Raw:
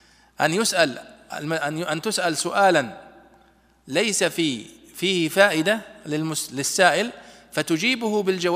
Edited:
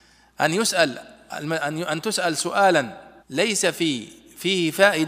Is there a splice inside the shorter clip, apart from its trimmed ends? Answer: yes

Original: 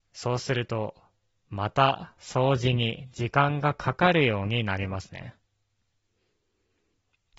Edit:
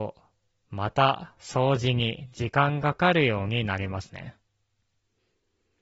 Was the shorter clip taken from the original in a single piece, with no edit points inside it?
no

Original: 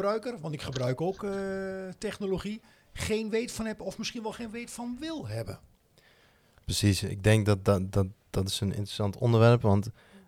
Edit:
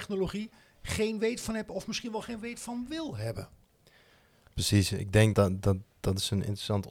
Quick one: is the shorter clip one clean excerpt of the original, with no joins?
no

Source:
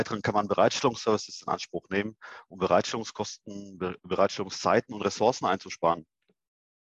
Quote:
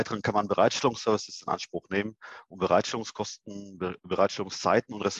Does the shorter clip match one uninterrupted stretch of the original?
yes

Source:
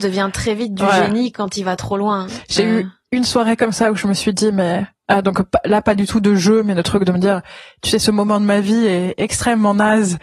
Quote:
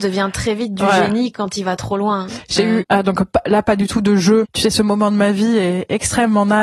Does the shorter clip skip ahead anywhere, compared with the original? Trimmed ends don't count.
yes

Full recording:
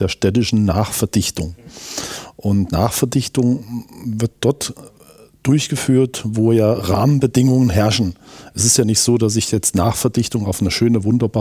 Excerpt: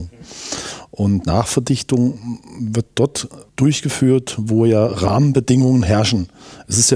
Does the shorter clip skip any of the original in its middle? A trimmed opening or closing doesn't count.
yes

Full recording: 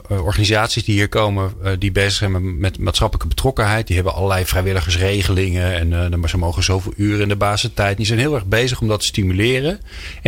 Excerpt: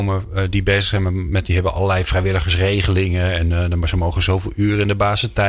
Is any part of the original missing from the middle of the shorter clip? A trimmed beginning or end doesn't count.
yes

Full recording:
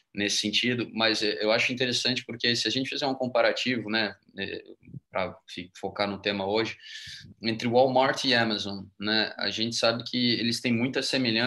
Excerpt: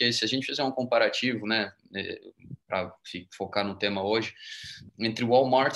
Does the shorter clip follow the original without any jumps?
yes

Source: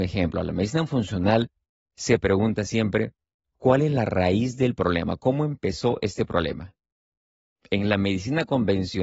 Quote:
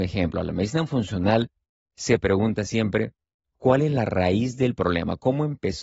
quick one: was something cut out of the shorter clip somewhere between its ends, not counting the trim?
no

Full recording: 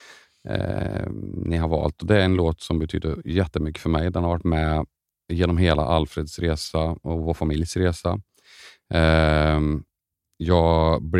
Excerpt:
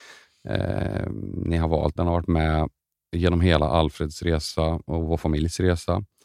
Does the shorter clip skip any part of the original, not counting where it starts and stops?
yes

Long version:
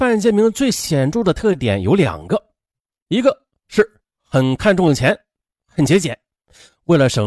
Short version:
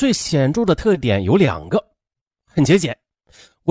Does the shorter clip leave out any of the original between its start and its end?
yes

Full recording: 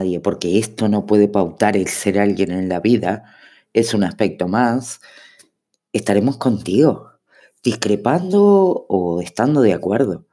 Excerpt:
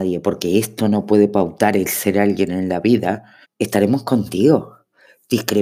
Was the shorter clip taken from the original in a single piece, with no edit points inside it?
no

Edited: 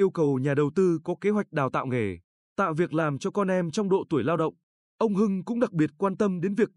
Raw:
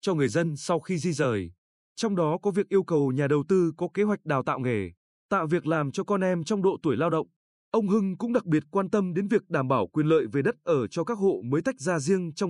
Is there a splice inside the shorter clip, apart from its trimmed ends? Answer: no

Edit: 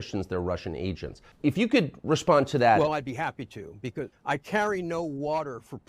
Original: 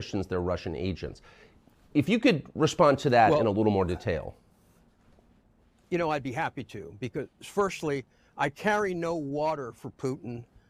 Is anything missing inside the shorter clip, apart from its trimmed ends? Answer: yes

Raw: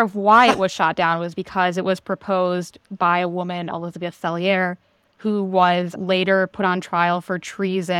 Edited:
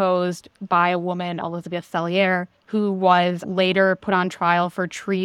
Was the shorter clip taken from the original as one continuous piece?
no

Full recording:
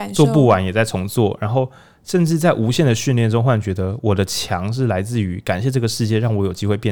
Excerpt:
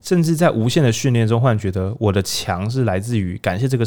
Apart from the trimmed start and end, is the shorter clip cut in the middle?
no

